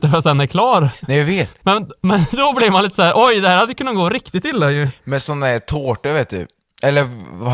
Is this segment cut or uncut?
cut